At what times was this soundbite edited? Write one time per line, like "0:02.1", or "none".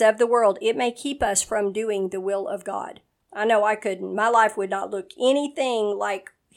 0:03.2